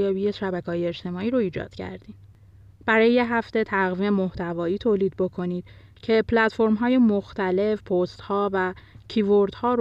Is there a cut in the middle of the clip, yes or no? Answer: yes